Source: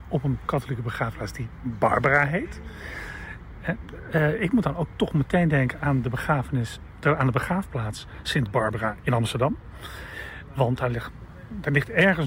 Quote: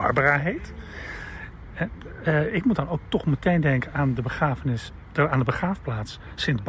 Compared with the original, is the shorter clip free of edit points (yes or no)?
yes